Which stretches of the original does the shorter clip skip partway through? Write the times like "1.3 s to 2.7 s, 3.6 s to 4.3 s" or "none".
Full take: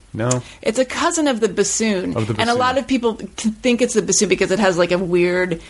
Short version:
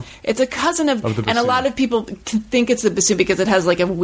1.4 s to 2.1 s